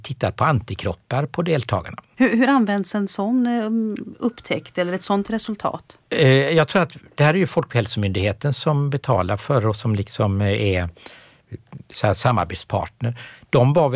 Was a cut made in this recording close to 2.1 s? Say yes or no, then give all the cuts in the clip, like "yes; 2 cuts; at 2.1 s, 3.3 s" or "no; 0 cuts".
yes; 1 cut; at 2.1 s